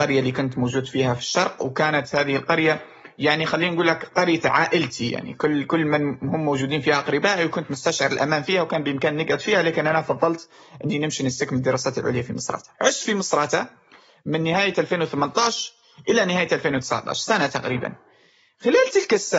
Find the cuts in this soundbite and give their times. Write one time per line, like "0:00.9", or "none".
0:12.7